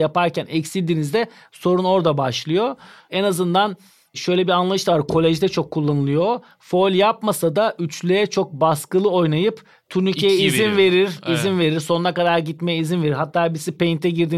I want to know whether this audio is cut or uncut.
uncut